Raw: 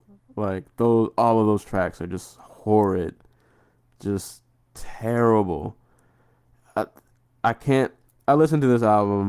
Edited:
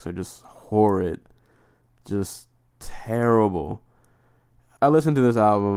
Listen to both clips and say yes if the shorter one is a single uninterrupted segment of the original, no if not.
no